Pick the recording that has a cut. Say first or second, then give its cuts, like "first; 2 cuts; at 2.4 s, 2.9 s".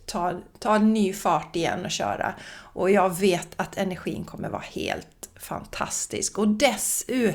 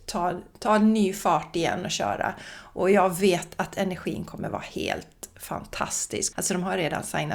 second; 1 cut; at 6.3 s